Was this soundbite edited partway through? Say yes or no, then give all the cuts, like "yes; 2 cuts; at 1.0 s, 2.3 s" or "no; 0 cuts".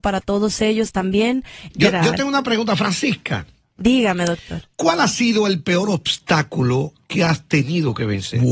yes; 1 cut; at 1.7 s